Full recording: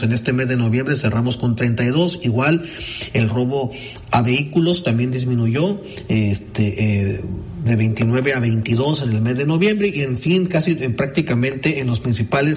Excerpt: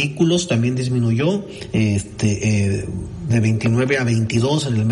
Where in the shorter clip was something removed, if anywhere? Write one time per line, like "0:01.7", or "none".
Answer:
none